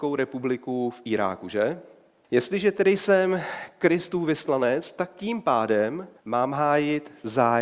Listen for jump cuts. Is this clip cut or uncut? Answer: cut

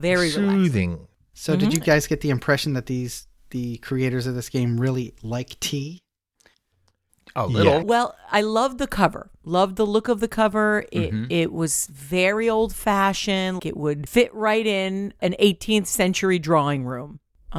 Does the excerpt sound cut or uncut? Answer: cut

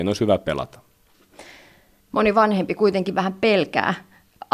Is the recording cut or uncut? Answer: cut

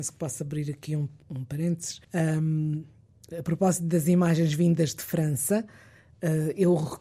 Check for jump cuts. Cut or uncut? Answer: cut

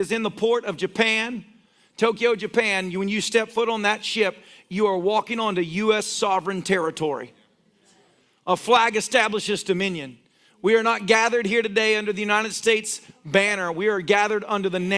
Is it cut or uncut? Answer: uncut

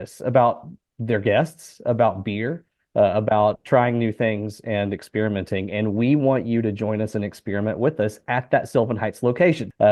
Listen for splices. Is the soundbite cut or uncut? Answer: uncut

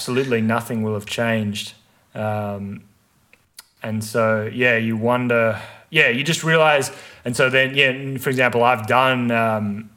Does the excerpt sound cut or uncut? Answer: uncut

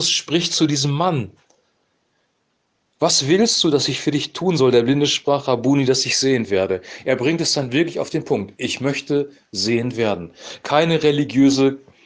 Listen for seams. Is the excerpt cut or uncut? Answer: uncut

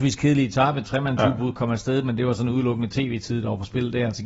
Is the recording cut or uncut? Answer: uncut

